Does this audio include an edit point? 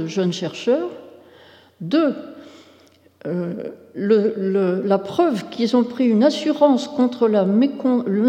no; 0 cuts

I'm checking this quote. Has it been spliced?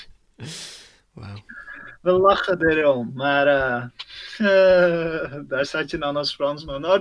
no; 0 cuts

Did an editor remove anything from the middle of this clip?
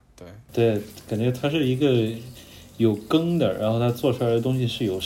no; 0 cuts

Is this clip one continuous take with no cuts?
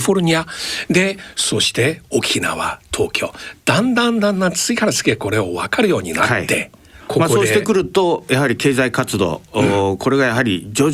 yes; 0 cuts

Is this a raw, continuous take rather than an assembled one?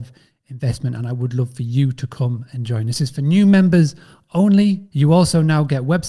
no; 1 cut; at 4.9 s

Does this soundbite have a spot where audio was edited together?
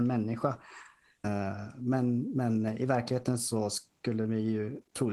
yes; 1 cut; at 1.2 s

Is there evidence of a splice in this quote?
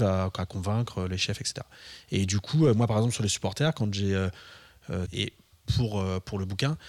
yes; 1 cut; at 5.1 s

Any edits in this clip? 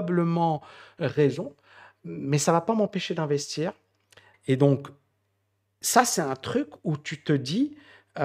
yes; 1 cut; at 4.3 s

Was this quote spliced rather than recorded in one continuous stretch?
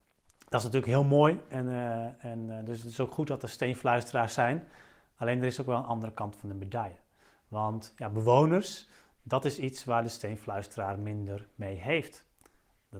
no; 0 cuts

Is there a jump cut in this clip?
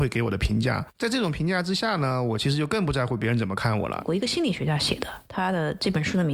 yes; 1 cut; at 4.0 s

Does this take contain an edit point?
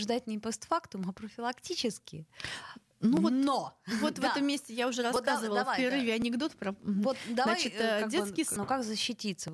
yes; 1 cut; at 8.6 s

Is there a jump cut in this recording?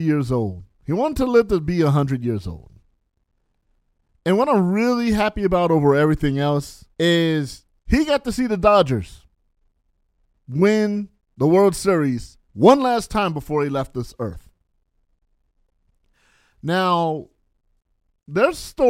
yes; 2 cuts; at 6.9 s, 12.4 s

